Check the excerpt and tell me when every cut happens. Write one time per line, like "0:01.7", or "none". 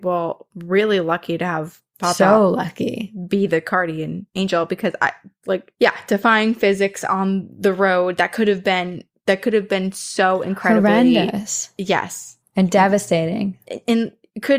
none